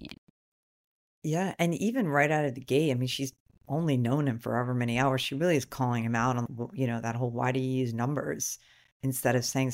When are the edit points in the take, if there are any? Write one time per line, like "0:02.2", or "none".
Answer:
0:06.5